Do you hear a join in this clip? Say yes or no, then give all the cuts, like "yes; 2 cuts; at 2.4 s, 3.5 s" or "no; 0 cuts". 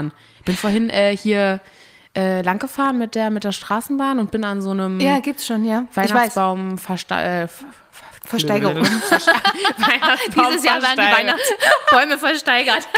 no; 0 cuts